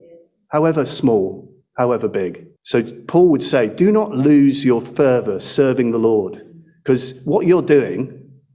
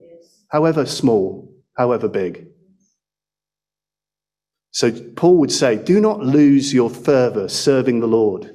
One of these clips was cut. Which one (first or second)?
first